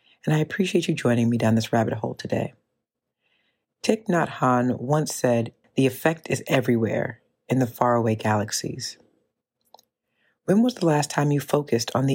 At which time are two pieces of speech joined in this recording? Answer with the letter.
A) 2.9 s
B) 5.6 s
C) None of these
B